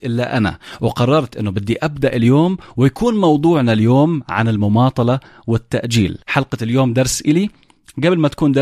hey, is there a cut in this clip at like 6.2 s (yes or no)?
yes